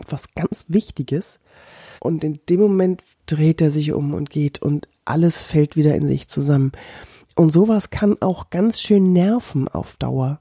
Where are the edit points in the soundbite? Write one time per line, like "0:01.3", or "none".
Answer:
0:02.0
0:03.1